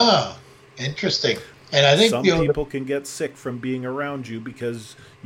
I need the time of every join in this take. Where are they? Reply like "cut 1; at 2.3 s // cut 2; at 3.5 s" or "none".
cut 1; at 1.5 s